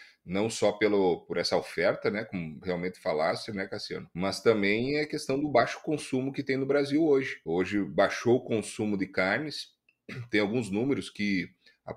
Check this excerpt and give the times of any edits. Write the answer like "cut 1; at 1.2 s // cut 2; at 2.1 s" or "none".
none